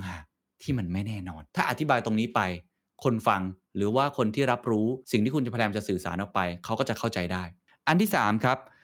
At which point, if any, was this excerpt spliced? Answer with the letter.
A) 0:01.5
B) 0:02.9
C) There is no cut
A